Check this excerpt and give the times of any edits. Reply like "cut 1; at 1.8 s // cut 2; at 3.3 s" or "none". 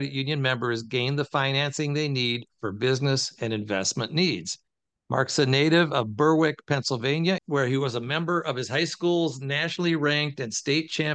cut 1; at 7.4 s